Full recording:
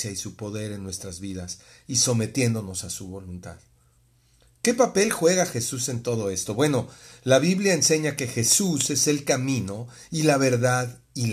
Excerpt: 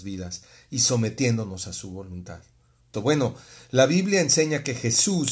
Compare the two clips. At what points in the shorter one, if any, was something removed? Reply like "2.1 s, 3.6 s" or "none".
2.9 s